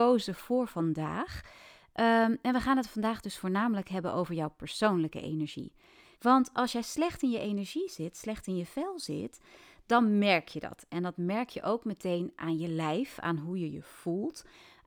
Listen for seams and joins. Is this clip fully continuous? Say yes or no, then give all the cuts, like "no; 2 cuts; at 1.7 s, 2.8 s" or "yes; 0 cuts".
no; 1 cut; at 6.1 s